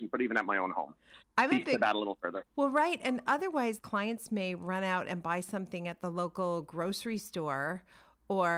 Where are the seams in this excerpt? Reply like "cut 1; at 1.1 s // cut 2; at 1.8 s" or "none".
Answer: cut 1; at 1.2 s // cut 2; at 2.5 s // cut 3; at 3.8 s